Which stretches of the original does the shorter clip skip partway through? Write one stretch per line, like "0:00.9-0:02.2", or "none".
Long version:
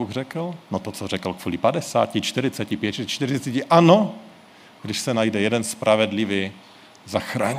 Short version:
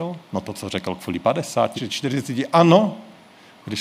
0:02.1-0:02.9